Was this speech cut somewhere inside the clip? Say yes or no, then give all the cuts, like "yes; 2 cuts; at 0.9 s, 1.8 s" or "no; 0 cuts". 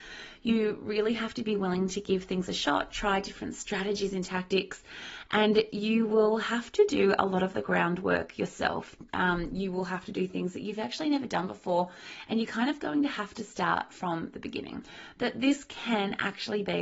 no; 0 cuts